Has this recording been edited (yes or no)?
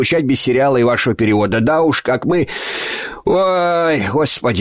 no